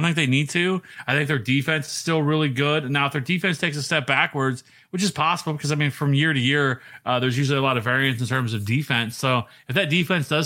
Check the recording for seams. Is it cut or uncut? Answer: uncut